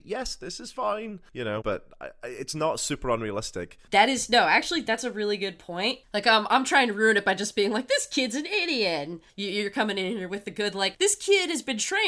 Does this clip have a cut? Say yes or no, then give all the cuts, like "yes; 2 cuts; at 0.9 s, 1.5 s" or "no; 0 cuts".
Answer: yes; 1 cut; at 1.6 s